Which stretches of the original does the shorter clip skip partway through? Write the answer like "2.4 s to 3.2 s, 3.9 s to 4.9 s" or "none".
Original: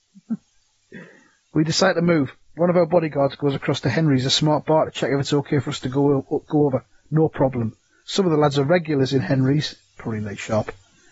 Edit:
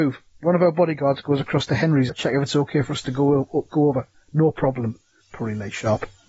4.2 s to 4.9 s, 8.0 s to 9.9 s